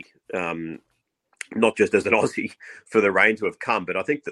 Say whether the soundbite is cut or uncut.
uncut